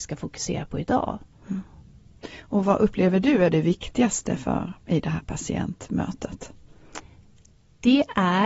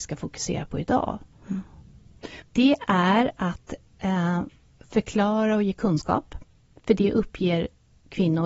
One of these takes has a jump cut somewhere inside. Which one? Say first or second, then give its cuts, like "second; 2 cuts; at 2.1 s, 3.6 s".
second; 1 cut; at 2.4 s